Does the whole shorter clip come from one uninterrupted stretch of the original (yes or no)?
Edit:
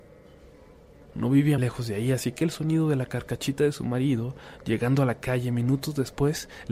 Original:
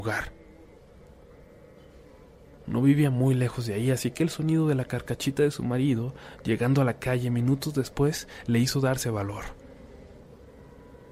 no